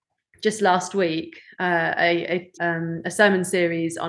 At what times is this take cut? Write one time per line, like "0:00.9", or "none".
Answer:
0:02.6